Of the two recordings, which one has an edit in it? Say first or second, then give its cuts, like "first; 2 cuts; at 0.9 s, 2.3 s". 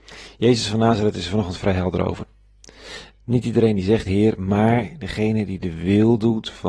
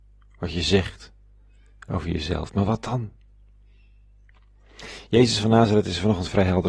first; 1 cut; at 4.0 s